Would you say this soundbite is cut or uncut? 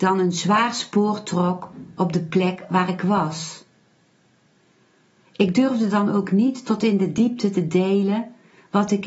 uncut